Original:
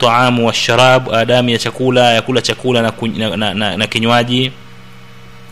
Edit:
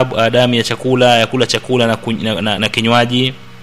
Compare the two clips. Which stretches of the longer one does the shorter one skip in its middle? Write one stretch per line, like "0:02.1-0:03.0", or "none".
0:03.5-0:03.8